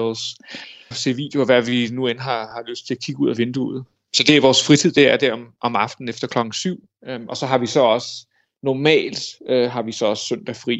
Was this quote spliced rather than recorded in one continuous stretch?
yes; 1 cut; at 0.9 s

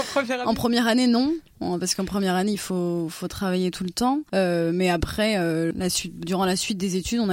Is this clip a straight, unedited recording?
yes; 0 cuts

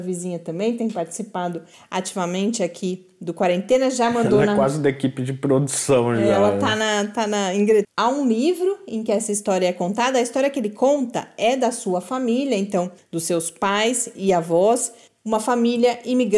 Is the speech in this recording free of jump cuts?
no; 1 cut; at 7.8 s

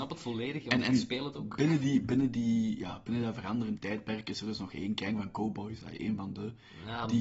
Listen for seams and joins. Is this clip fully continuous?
yes; 0 cuts

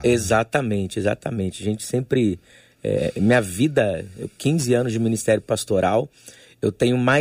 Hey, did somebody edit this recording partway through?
no; 0 cuts

